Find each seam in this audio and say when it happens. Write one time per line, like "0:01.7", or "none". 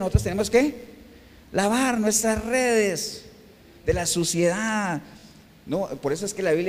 none